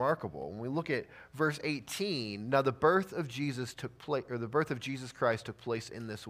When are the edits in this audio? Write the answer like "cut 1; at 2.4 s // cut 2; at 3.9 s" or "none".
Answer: none

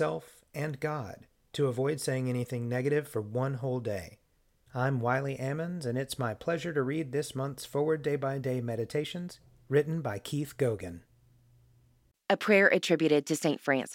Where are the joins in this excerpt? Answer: cut 1; at 4.7 s

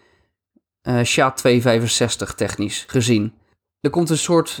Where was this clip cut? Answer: cut 1; at 3.6 s

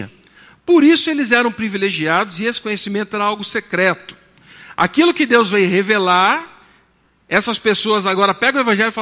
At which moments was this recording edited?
none

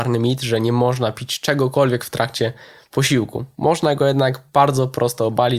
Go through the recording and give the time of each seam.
none

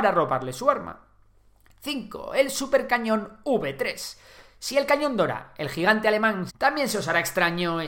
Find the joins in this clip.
cut 1; at 6.5 s

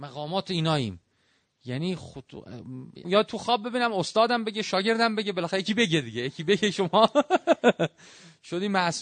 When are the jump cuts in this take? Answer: cut 1; at 3.0 s

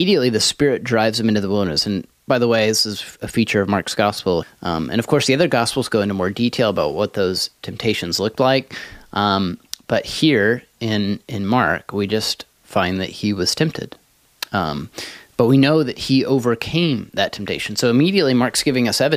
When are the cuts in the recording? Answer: cut 1; at 4.4 s

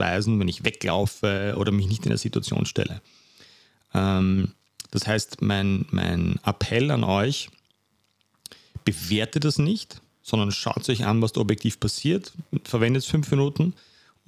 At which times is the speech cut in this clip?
none

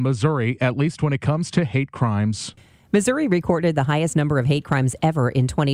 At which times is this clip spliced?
none

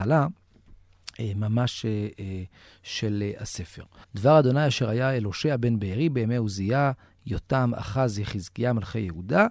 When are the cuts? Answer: cut 1; at 4.0 s

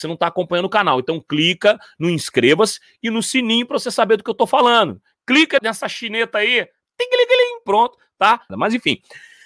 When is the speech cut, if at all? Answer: cut 1; at 5.6 s // cut 2; at 8.5 s

